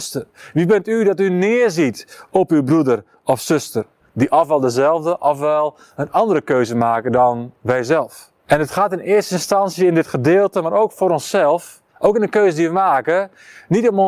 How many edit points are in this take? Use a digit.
3